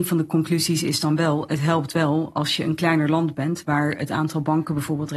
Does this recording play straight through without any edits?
yes; 0 cuts

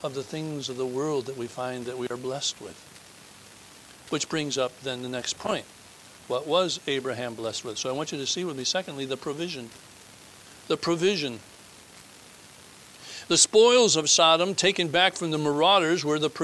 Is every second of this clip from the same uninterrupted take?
yes; 0 cuts

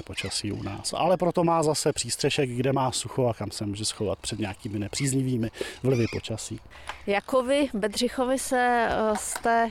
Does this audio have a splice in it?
no; 0 cuts

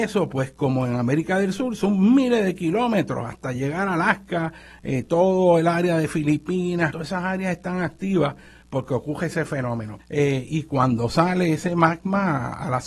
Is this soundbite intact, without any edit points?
no; 2 cuts; at 6.9 s, 10.0 s

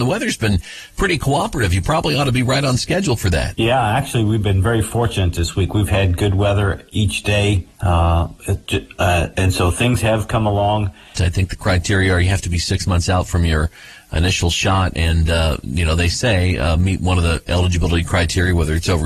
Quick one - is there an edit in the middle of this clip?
yes; 2 cuts; at 7.7 s, 11.1 s

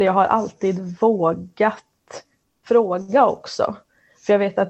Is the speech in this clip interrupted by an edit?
no; 0 cuts

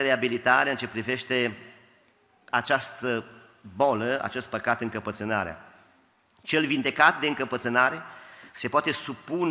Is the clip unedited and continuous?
yes; 0 cuts

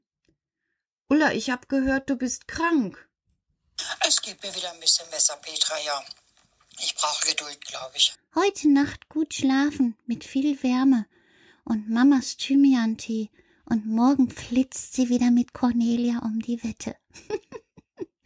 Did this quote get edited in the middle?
yes; 1 cut; at 8.1 s

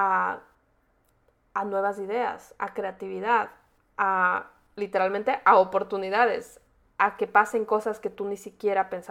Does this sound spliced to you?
no; 0 cuts

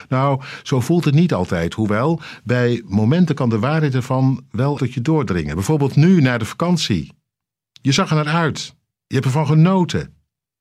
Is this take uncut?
no; 1 cut; at 4.8 s

